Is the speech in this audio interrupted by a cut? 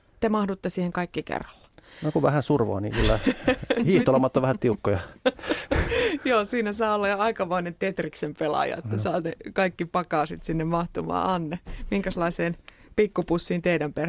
no; 0 cuts

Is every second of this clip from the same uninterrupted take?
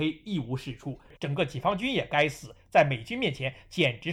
no; 1 cut; at 1.2 s

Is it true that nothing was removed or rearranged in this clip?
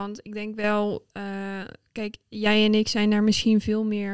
yes; 0 cuts

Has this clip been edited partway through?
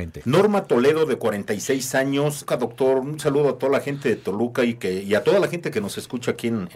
yes; 1 cut; at 2.5 s

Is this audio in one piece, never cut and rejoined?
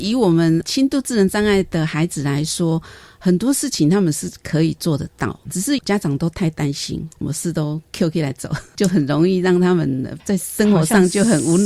yes; 0 cuts

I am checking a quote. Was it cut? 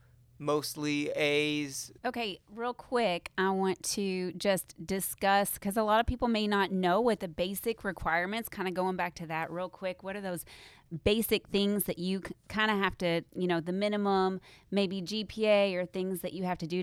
yes; 1 cut; at 2.0 s

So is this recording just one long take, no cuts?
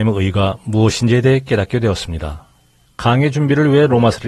no; 1 cut; at 2.8 s

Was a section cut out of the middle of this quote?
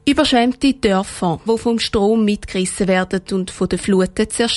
yes; 1 cut; at 1.5 s

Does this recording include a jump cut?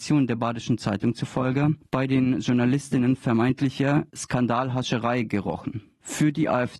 yes; 1 cut; at 4.1 s

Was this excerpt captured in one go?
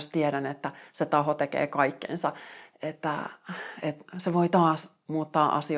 yes; 0 cuts

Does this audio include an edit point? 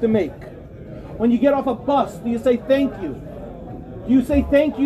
yes; 1 cut; at 1.2 s

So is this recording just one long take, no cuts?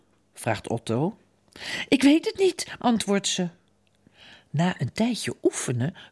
no; 1 cut; at 2.8 s

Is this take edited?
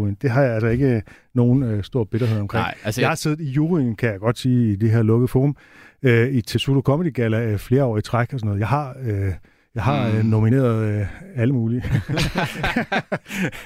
no; 0 cuts

